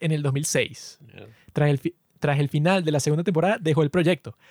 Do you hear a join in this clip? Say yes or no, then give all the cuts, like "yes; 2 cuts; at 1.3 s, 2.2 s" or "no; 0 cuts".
no; 0 cuts